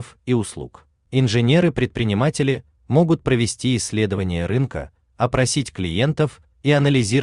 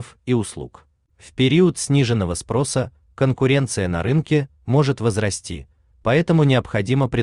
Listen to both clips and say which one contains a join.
first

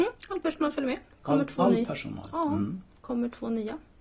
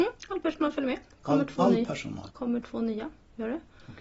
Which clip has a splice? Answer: second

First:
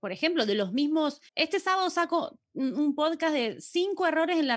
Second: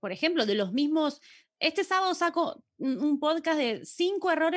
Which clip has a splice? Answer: first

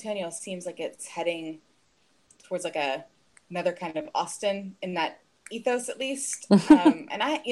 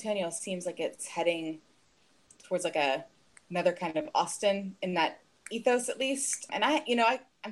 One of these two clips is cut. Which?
second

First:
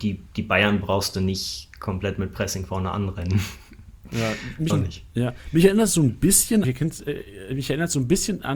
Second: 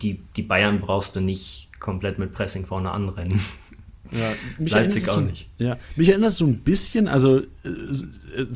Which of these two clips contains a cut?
first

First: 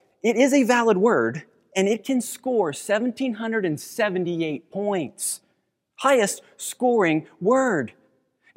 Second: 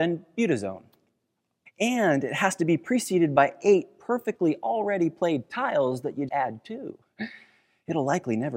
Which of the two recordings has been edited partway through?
second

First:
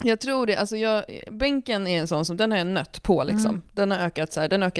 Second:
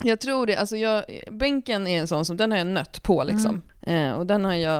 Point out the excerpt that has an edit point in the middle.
second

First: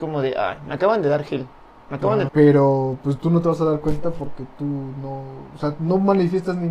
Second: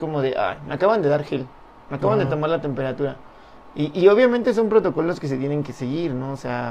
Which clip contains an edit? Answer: first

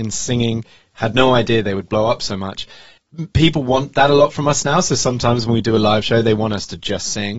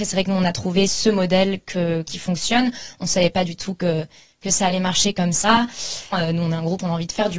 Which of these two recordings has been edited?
second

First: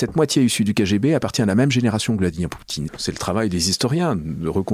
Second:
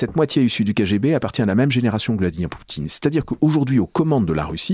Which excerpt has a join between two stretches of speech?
first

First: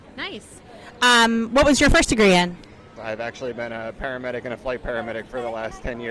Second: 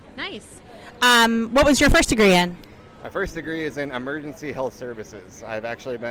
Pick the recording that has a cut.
first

